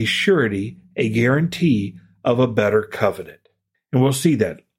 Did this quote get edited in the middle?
yes; 1 cut; at 3.7 s

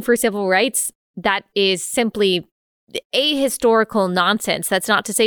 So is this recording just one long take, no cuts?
yes; 0 cuts

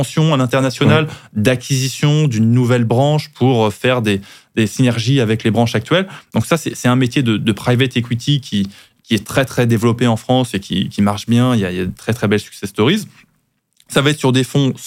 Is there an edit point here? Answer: no; 0 cuts

